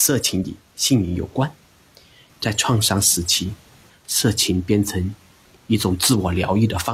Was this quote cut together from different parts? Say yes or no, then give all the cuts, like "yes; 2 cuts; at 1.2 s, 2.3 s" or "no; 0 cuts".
yes; 2 cuts; at 2.3 s, 3.9 s